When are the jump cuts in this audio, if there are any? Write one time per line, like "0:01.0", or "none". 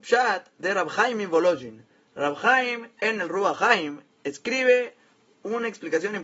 none